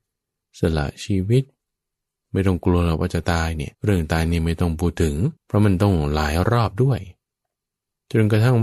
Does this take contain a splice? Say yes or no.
yes